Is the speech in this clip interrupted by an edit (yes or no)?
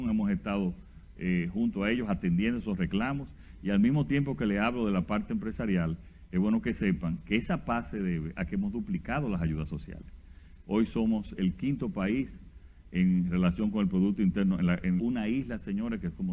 yes